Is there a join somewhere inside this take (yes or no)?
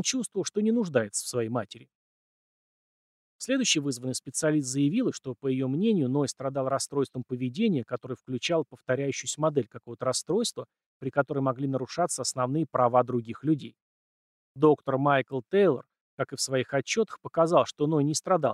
yes